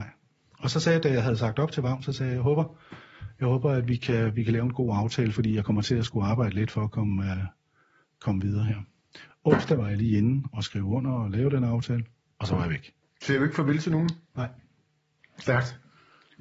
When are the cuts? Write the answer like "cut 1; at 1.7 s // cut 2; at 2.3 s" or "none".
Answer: cut 1; at 9.3 s